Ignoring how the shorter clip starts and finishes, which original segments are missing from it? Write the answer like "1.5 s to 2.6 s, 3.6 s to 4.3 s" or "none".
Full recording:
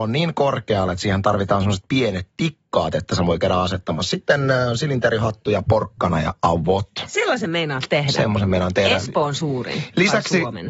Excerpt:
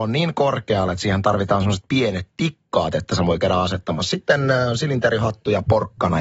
none